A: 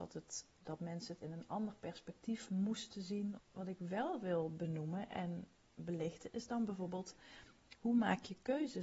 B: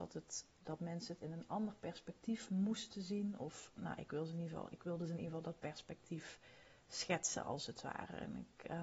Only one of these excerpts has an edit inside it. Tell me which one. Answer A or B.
A